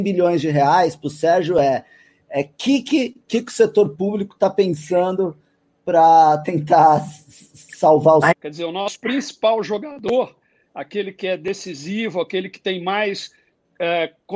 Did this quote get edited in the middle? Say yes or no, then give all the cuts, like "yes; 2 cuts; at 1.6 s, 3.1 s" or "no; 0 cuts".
yes; 1 cut; at 8.3 s